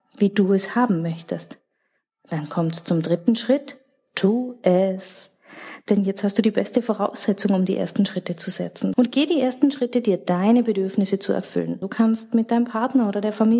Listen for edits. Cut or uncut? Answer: cut